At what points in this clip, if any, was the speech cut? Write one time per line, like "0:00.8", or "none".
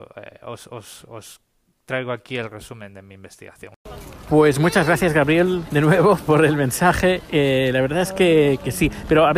none